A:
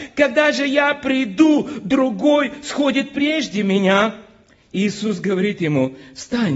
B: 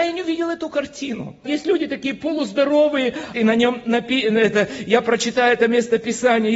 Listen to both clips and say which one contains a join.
B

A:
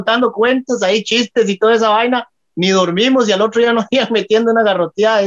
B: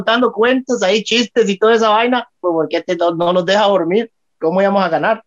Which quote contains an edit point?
B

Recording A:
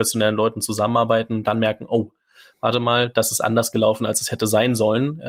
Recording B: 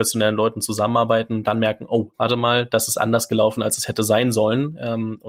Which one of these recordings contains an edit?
B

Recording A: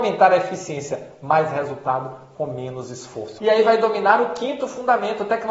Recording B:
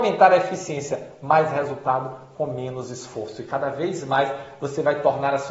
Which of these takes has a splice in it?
A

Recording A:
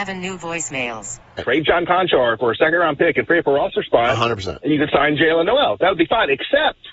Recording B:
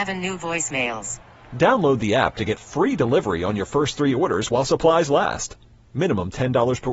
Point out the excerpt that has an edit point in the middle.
A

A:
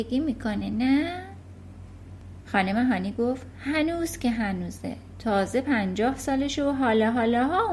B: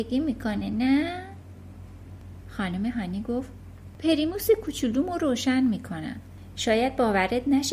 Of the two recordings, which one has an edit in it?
B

